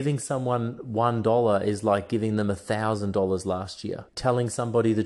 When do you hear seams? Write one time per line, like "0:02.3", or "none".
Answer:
0:04.1